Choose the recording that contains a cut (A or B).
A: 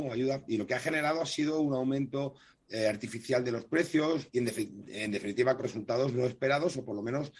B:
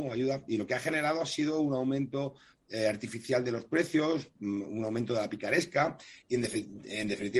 A